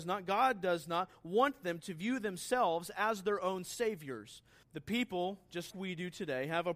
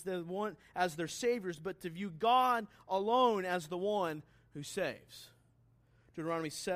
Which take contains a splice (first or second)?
first